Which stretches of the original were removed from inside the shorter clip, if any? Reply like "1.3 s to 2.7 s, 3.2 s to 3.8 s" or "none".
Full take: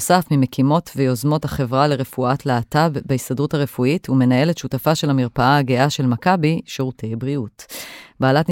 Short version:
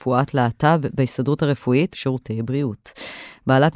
4.0 s to 6.6 s